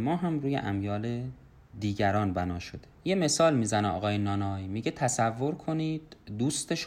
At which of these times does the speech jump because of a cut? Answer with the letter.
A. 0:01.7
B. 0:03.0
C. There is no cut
B